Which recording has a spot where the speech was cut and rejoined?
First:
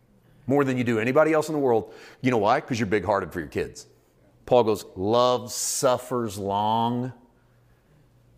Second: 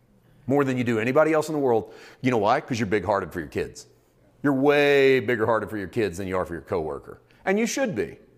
first; 1 cut; at 4.3 s

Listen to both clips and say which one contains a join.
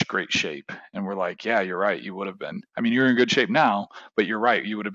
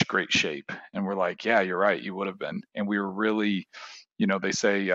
second; 1 cut; at 2.7 s

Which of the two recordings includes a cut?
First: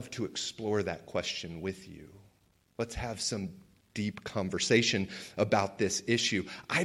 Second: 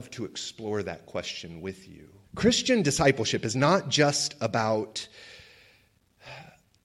second; 1 cut; at 2.2 s

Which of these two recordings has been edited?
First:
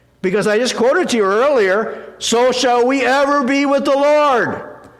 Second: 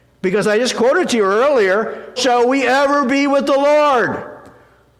second; 1 cut; at 2.2 s

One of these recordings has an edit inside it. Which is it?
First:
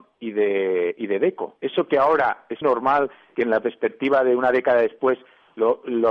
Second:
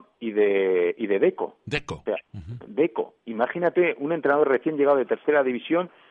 first; 2 cuts; at 1.6 s, 2.6 s

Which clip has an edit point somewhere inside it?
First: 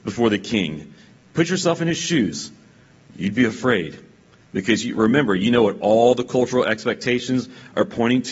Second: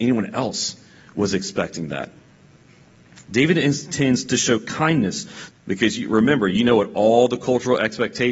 second; 2 cuts; at 3.2 s, 5.5 s

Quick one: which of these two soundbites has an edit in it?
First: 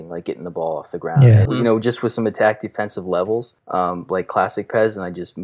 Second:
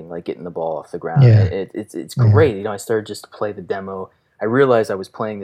first; 2 cuts; at 1.5 s, 3.6 s

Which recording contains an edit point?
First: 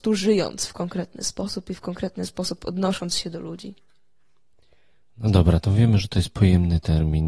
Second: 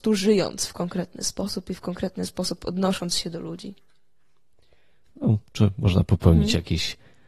second; 1 cut; at 5.1 s

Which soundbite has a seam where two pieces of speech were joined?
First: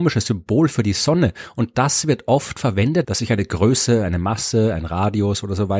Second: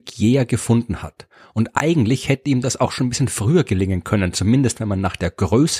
first; 1 cut; at 3.0 s

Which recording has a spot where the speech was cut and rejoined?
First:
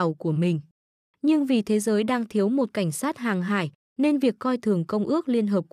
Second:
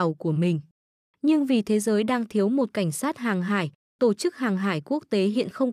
first; 1 cut; at 3.8 s

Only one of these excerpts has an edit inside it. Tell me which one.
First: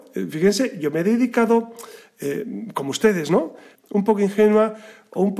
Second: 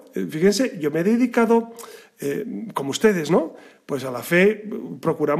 first; 1 cut; at 3.7 s

